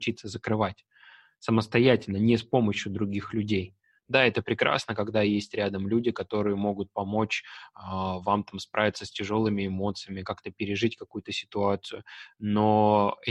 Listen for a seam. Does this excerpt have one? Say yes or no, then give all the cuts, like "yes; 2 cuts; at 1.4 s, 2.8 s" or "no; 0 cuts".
no; 0 cuts